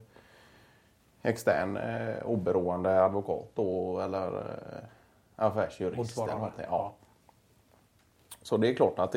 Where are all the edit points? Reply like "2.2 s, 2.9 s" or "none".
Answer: none